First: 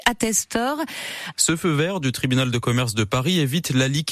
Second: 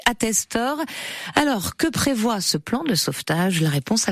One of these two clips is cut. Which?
first; 1 cut; at 1.3 s

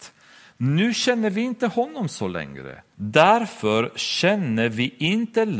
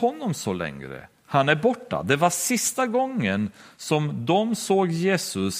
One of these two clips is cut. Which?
first; 1 cut; at 2.9 s

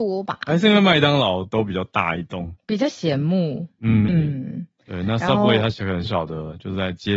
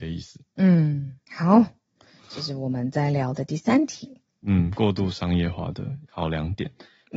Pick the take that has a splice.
first; 2 cuts; at 4.1 s, 6.0 s

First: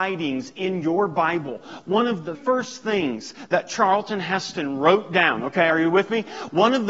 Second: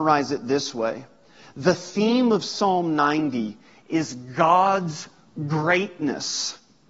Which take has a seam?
first; 1 cut; at 2.3 s

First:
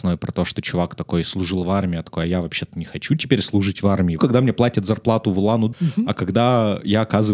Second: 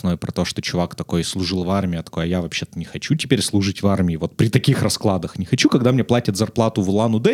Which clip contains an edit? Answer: first; 2 cuts; at 4.2 s, 5.7 s

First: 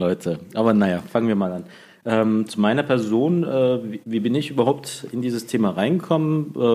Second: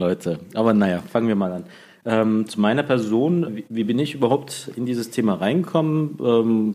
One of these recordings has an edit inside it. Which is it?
second; 1 cut; at 3.5 s

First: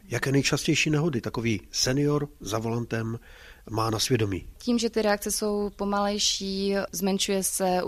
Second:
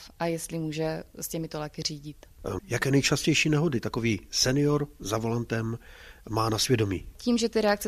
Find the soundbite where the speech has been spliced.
second; 1 cut; at 2.6 s

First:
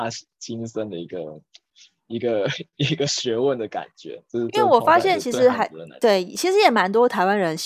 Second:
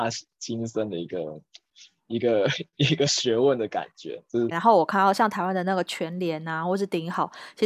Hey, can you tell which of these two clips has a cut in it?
second; 1 cut; at 4.5 s

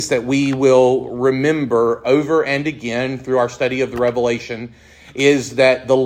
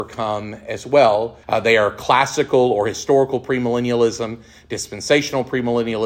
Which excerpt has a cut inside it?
second; 1 cut; at 1.4 s

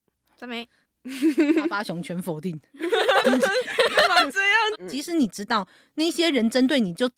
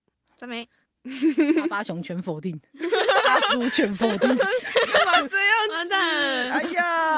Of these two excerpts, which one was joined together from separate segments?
first; 2 cuts; at 3.2 s, 4.7 s

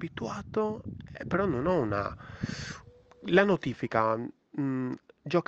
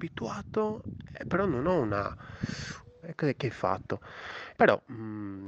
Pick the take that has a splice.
second; 2 cuts; at 3.0 s, 4.5 s

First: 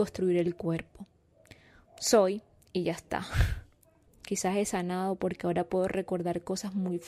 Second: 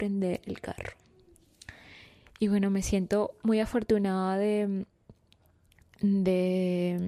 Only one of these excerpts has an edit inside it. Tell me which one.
first; 1 cut; at 4.1 s

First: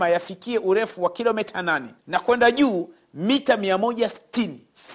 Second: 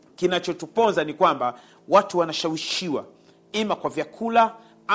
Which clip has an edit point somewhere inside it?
first; 1 cut; at 2.0 s

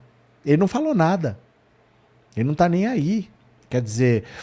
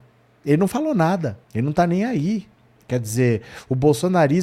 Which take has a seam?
second; 1 cut; at 1.4 s

